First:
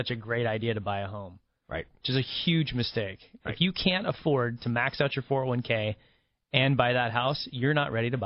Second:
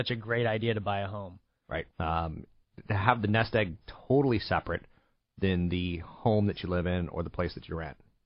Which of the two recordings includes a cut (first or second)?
second